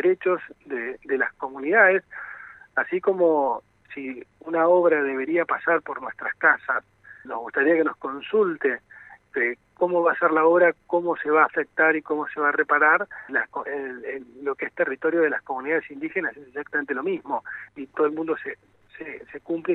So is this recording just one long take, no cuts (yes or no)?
no